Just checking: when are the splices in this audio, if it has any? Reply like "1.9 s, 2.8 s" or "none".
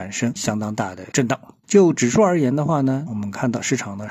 1.6 s, 3.1 s